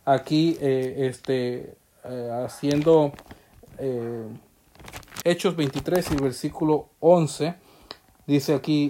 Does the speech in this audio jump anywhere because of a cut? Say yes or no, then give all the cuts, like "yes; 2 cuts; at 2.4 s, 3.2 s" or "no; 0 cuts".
yes; 1 cut; at 5.2 s